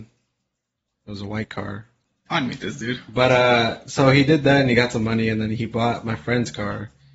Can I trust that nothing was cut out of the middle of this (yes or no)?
no